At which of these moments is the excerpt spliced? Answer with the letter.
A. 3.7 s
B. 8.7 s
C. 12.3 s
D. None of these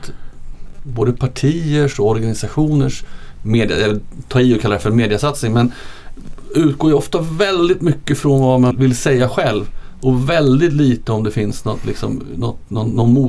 B